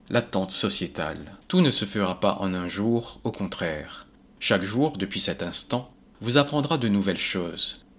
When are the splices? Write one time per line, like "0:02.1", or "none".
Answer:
0:01.4